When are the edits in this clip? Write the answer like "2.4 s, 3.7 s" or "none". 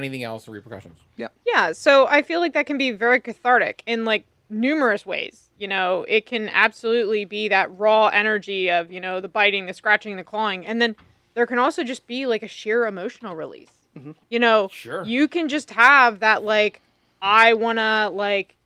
none